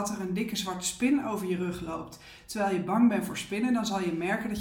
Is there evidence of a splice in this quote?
no; 0 cuts

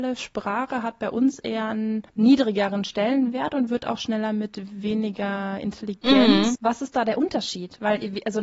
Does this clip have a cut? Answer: yes; 2 cuts; at 2.1 s, 6.6 s

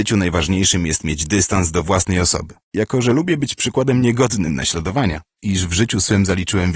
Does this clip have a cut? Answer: yes; 2 cuts; at 2.6 s, 5.4 s

